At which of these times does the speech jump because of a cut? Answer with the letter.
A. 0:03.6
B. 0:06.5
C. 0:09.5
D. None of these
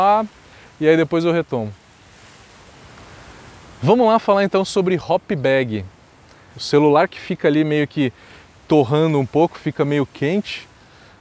B